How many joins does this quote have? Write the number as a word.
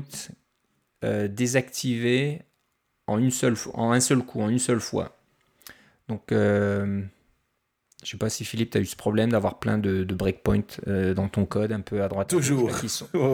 zero